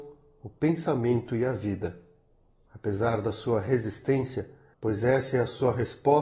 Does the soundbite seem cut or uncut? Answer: cut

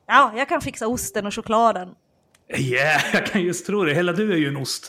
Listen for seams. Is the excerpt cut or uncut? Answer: uncut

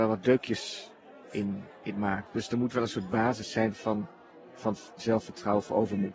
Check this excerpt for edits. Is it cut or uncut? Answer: cut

